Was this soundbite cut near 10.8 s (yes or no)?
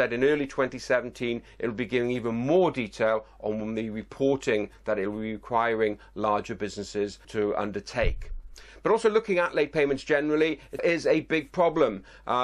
yes